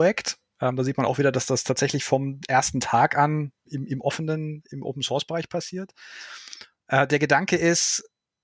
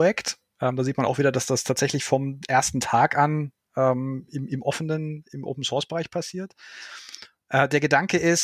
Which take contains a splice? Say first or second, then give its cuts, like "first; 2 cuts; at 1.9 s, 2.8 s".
first; 1 cut; at 3.6 s